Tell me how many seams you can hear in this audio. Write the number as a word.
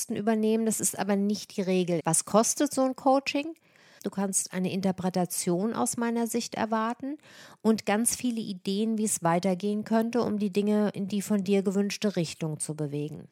two